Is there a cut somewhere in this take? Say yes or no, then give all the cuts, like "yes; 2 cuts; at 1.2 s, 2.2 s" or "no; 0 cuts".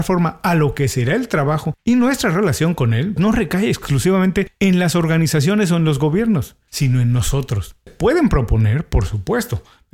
yes; 2 cuts; at 3.2 s, 7.9 s